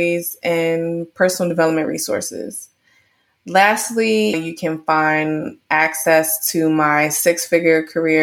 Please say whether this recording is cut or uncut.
cut